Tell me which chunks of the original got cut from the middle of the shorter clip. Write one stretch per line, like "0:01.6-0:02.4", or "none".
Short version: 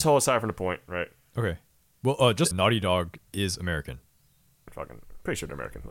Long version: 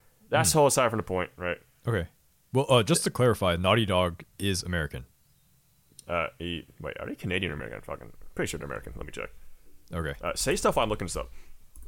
0:03.0-0:03.6
0:05.7-0:07.8